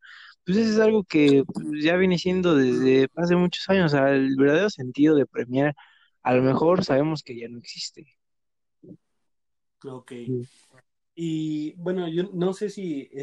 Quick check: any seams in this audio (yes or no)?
no